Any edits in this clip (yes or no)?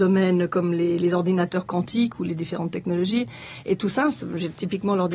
no